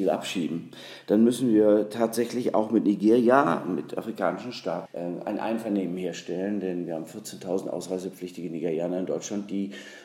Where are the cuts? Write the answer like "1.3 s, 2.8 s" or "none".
4.9 s